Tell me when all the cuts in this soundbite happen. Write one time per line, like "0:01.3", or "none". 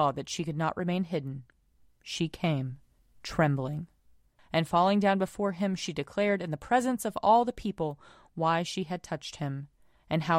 none